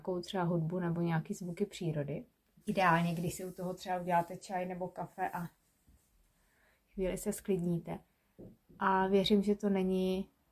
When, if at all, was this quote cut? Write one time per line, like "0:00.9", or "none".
0:02.6